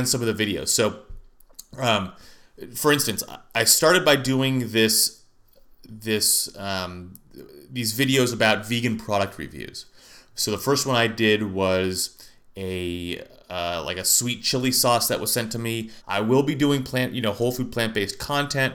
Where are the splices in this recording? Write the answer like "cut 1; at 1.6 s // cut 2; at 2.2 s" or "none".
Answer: cut 1; at 16.0 s